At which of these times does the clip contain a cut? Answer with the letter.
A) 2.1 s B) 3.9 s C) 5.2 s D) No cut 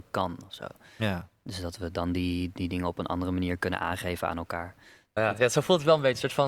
C